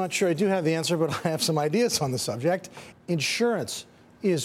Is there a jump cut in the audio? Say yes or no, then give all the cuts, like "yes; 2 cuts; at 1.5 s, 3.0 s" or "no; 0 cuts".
yes; 1 cut; at 2.9 s